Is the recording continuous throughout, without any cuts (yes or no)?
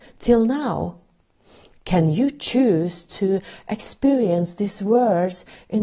yes